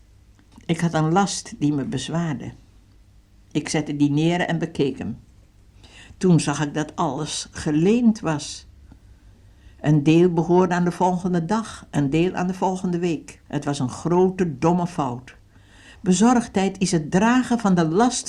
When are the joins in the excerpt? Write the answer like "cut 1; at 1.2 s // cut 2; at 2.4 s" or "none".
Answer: cut 1; at 13.5 s

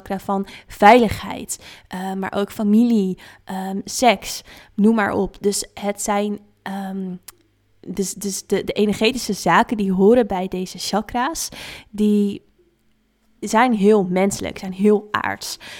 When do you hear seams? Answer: none

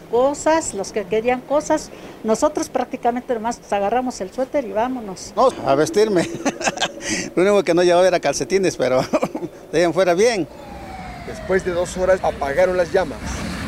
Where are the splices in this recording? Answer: cut 1; at 5.5 s // cut 2; at 12.2 s

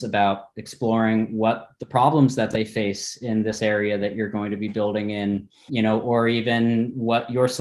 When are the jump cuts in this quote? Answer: cut 1; at 5.7 s

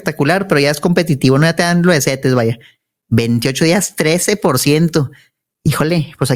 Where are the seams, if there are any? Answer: none

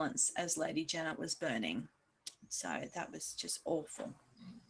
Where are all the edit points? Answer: none

